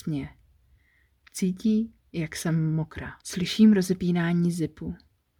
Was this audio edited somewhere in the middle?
yes; 1 cut; at 3.2 s

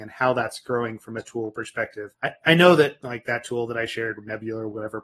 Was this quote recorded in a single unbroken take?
no; 1 cut; at 2.1 s

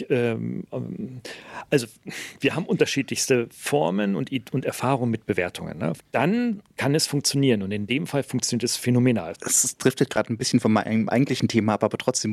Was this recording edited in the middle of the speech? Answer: yes; 2 cuts; at 6.0 s, 9.3 s

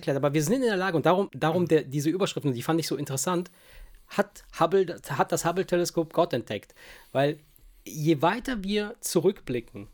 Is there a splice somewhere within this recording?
yes; 1 cut; at 1.3 s

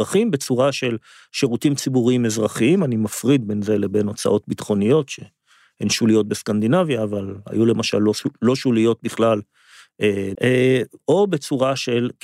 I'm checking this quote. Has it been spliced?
yes; 1 cut; at 10.3 s

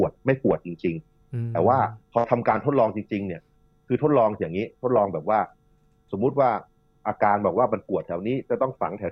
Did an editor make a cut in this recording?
yes; 1 cut; at 2.0 s

